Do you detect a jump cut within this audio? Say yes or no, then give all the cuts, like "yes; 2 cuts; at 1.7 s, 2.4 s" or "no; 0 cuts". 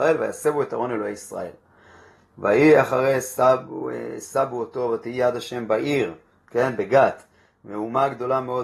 no; 0 cuts